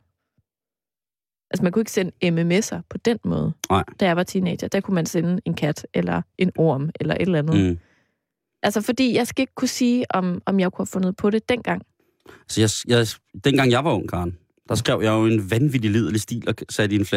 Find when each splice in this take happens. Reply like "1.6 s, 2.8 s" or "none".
none

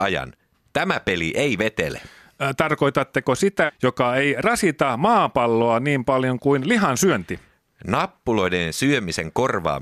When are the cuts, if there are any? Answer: 3.7 s

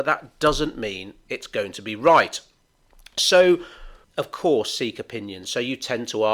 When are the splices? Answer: 4.0 s, 5.4 s

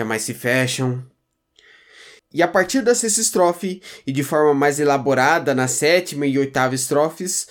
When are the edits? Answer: 2.2 s

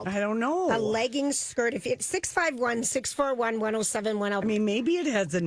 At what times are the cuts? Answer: none

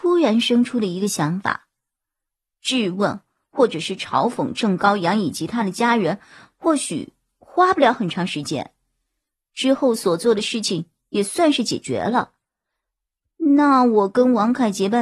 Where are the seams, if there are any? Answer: none

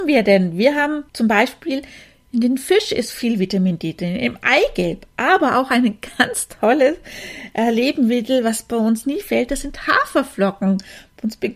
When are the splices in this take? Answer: 1.1 s

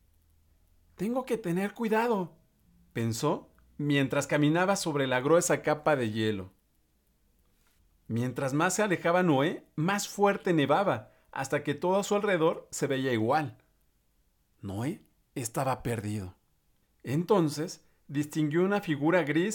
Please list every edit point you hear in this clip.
none

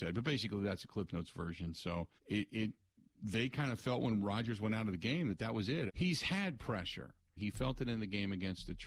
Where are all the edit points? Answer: 2.2 s, 5.9 s, 7.4 s

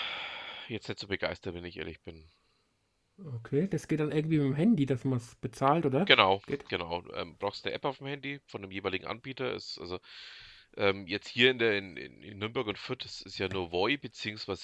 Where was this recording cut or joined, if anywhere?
none

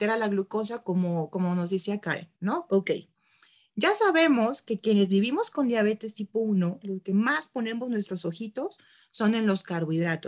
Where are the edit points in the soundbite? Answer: 2.7 s, 6.8 s

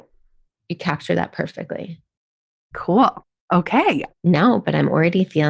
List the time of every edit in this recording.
4.1 s

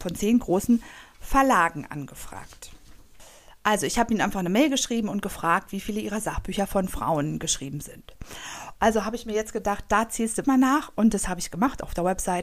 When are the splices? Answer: 8.8 s, 10.4 s

